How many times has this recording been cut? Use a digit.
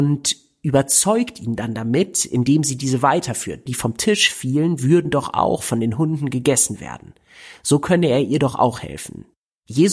1